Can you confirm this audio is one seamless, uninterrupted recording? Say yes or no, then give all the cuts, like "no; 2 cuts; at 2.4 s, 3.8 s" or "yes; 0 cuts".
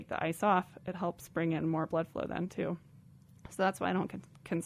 yes; 0 cuts